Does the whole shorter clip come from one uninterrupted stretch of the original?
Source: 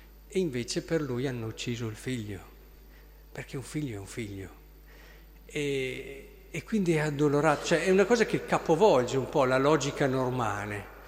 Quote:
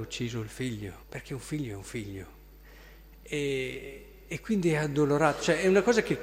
no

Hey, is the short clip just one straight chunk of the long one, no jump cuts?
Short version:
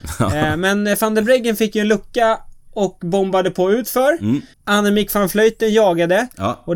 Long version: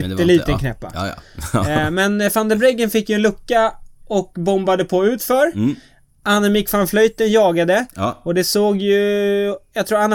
no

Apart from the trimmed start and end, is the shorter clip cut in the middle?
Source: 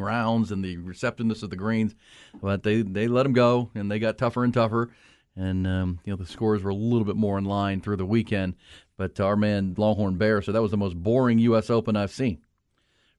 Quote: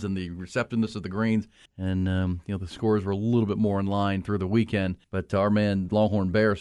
yes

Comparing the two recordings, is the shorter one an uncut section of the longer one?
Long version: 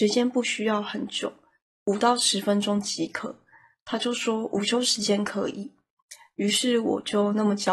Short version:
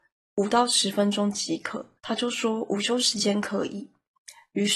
no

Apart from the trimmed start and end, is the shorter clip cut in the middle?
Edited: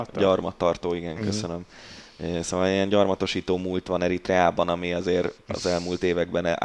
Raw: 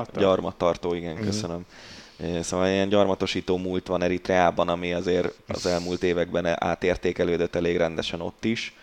no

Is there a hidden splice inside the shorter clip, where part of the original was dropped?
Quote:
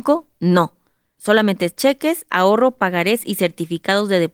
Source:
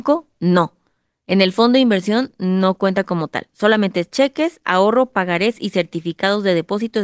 yes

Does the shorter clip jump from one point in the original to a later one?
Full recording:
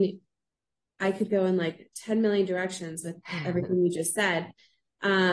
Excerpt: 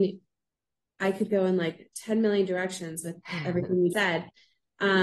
yes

